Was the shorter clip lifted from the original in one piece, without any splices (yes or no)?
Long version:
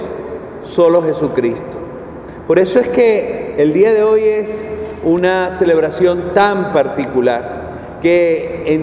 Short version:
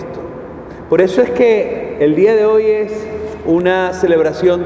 yes